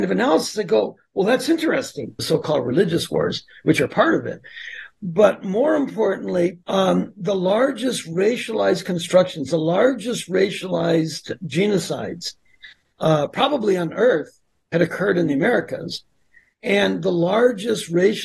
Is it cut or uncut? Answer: cut